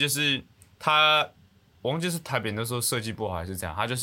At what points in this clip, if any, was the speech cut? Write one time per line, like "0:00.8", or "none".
none